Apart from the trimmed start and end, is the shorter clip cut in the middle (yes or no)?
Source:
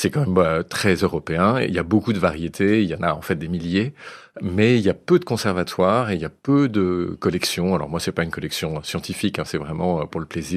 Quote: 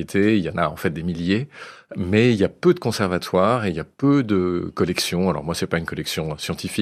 no